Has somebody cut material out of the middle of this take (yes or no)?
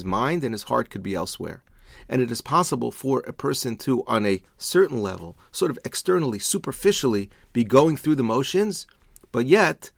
no